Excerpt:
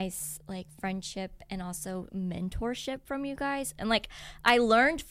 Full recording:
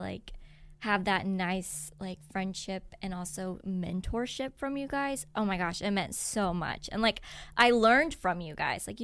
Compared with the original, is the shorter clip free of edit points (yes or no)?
no